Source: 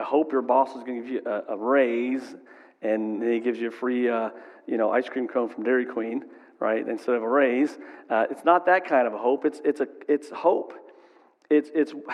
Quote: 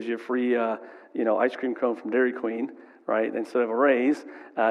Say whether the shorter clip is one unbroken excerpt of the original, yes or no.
yes